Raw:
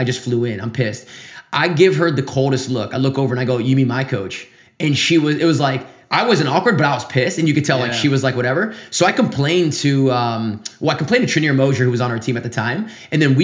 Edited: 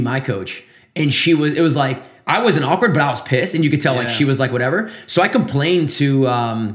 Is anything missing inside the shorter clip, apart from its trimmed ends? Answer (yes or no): no